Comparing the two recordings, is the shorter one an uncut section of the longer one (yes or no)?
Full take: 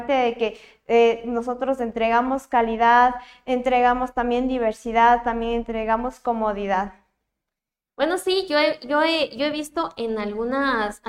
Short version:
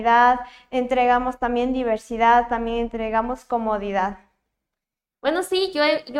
yes